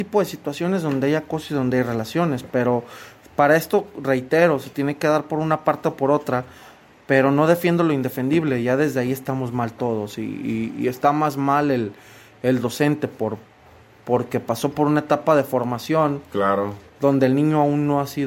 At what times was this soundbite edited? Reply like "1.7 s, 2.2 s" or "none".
none